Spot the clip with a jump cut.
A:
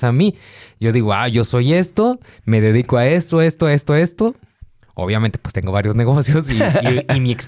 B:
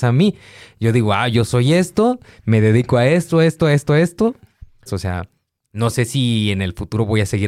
B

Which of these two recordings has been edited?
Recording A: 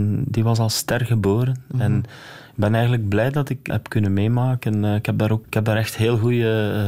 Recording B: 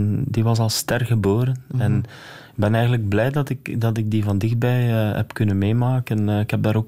A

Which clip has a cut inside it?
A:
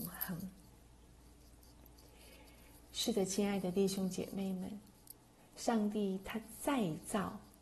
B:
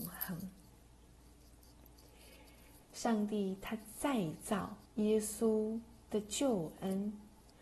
B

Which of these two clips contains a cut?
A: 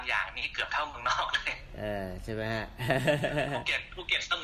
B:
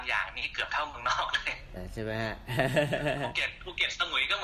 B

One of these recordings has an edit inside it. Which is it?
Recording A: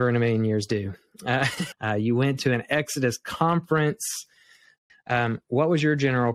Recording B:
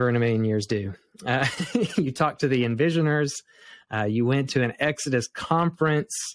A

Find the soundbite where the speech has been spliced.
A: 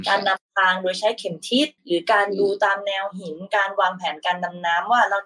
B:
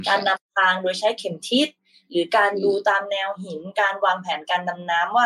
A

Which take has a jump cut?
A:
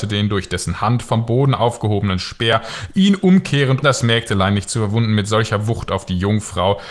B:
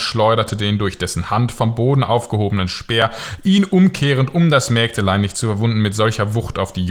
A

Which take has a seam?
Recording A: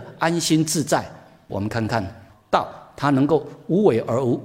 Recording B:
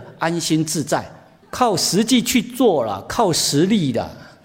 B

